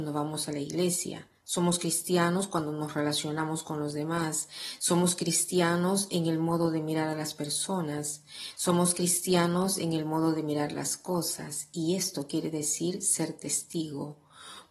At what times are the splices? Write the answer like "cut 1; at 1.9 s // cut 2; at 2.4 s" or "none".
cut 1; at 4.8 s